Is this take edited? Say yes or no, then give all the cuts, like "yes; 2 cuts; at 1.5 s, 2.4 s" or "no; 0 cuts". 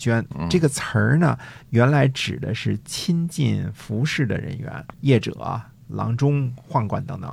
yes; 1 cut; at 4.9 s